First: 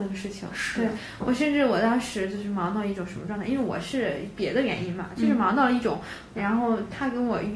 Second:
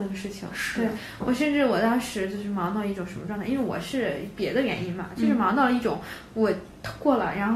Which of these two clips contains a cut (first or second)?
first